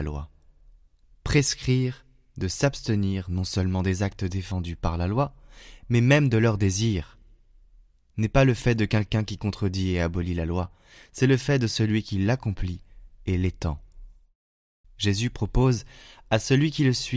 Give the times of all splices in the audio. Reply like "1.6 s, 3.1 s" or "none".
14.8 s